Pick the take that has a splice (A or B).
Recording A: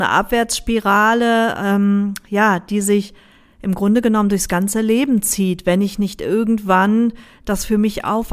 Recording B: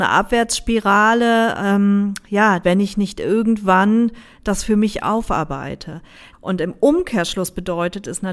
B